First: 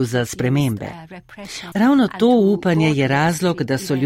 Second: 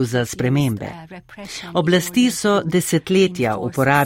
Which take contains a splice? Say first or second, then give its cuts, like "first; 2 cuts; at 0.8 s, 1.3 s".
first; 1 cut; at 1.7 s